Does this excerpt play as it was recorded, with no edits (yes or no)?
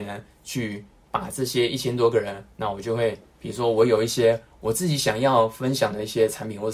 yes